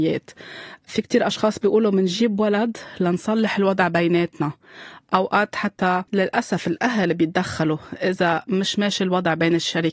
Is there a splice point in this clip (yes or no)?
yes